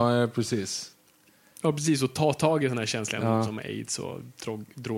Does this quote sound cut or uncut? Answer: uncut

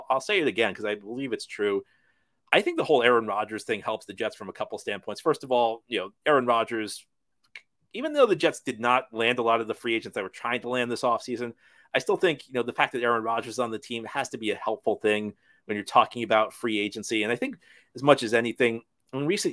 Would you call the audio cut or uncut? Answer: uncut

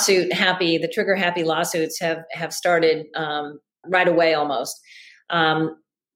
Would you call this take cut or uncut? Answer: cut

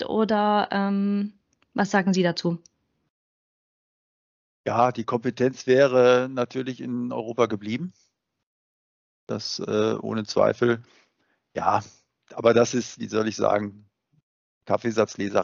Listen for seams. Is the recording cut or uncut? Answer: cut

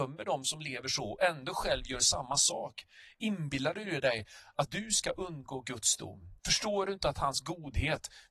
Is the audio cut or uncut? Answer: cut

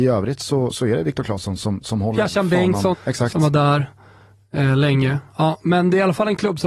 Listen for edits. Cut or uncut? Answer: cut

